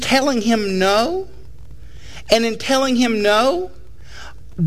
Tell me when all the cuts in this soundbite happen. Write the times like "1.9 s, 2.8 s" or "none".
none